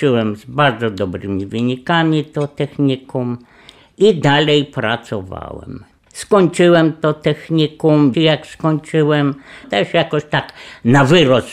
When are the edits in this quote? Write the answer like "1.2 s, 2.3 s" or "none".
5.9 s, 8.1 s, 9.6 s